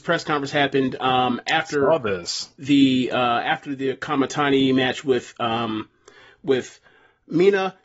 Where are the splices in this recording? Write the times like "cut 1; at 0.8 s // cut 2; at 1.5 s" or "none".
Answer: none